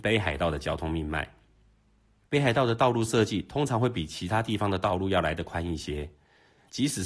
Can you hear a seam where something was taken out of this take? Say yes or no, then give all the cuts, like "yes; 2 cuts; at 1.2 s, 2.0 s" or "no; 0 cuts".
no; 0 cuts